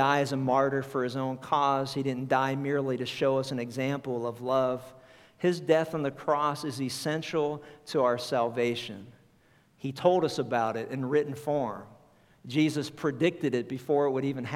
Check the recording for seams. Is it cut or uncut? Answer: cut